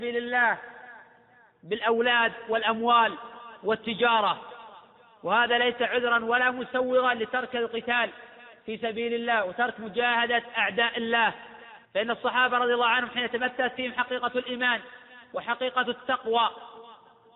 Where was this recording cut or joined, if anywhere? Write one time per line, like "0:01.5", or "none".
0:11.9